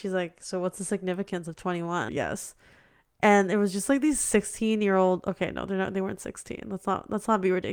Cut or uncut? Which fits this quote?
cut